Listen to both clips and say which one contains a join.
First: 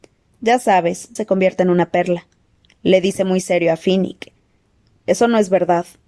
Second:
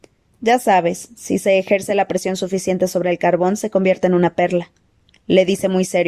first; 1 cut; at 1.2 s

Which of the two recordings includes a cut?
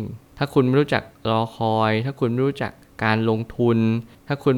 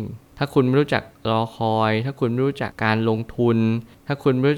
second; 1 cut; at 2.7 s

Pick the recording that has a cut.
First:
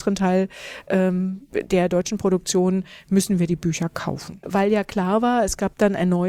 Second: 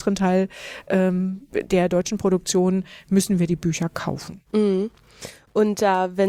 first; 1 cut; at 4.4 s

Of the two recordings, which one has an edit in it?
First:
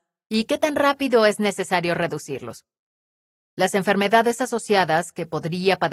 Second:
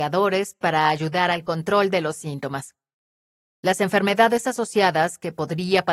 second; 1 cut; at 3.5 s

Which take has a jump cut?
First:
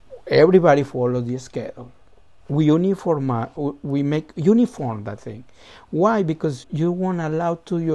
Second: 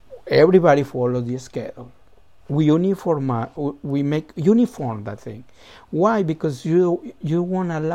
first; 1 cut; at 6.6 s

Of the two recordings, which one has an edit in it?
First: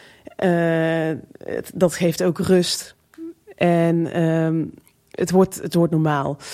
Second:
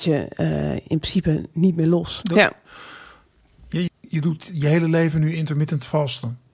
second; 2 cuts; at 2.2 s, 3.9 s

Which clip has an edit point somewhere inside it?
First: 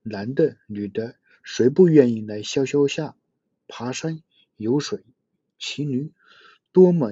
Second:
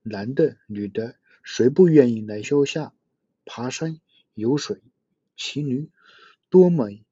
second; 1 cut; at 2.4 s

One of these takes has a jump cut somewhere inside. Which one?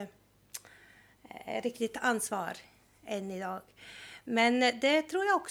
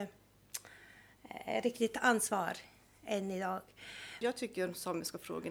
second; 1 cut; at 4.2 s

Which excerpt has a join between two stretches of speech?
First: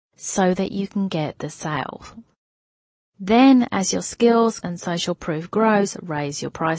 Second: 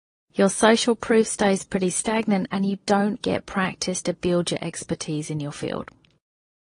first; 1 cut; at 4.6 s

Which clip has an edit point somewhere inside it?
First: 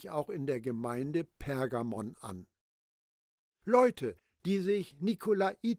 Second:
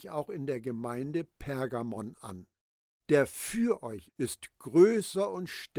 second; 2 cuts; at 3.0 s, 4.1 s

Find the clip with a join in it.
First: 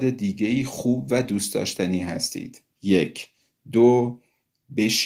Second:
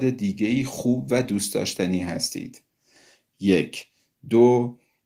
first; 1 cut; at 2.7 s

